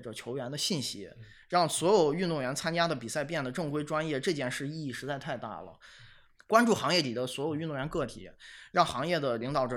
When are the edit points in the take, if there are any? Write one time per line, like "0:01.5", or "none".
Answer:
0:06.3